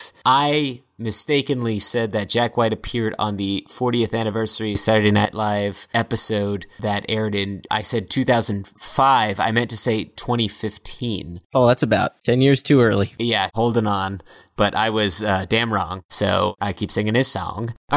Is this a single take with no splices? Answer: no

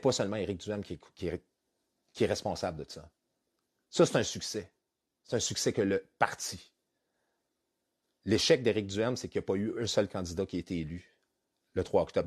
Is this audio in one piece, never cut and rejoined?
yes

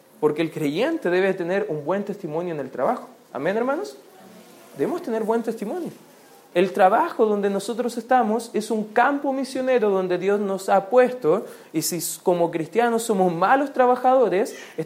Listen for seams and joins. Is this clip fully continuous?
yes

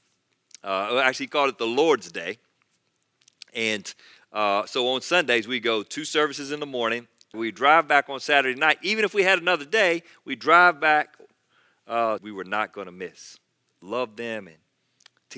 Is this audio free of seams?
no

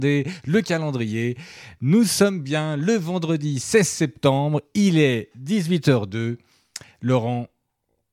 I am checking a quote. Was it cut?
no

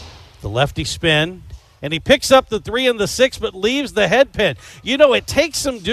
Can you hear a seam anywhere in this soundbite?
yes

